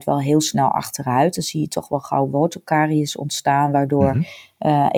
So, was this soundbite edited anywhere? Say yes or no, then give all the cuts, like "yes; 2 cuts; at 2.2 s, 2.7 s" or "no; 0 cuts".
no; 0 cuts